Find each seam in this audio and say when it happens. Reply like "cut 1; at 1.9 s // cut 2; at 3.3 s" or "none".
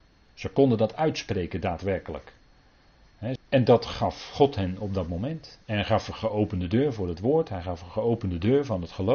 cut 1; at 3.4 s